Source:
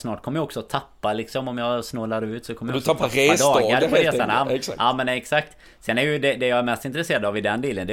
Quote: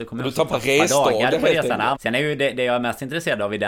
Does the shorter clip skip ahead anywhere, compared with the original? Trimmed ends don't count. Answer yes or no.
yes